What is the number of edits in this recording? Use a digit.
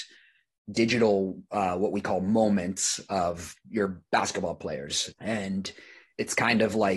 1